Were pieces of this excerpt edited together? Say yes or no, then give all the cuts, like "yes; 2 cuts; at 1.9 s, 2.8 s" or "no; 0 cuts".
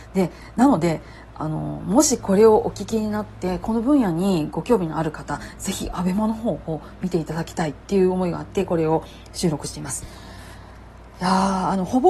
no; 0 cuts